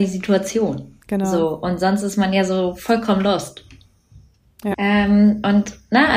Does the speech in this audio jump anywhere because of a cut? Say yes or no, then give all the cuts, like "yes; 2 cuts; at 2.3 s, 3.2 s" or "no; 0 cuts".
yes; 2 cuts; at 1.0 s, 4.7 s